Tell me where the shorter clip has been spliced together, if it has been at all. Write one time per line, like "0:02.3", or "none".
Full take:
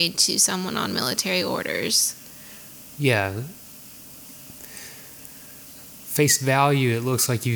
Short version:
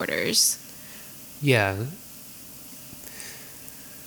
none